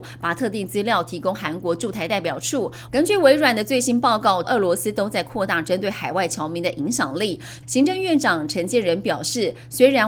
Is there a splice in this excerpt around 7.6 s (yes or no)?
yes